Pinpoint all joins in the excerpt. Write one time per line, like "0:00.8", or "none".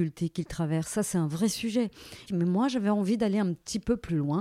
0:02.3

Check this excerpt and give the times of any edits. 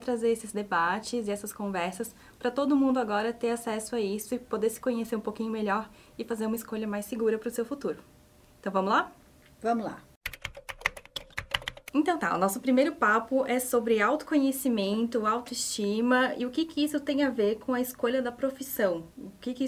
none

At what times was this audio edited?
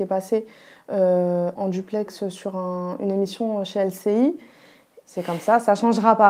0:01.6
0:05.0

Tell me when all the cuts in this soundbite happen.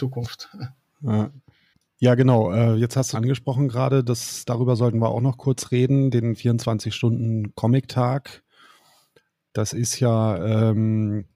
0:03.1

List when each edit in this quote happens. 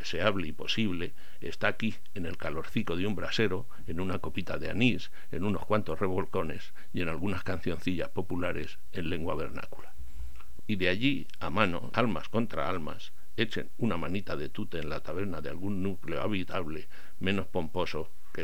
0:10.6
0:11.9

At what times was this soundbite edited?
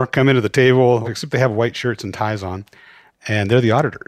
0:01.0

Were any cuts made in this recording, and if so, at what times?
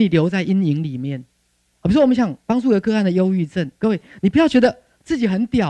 0:01.6

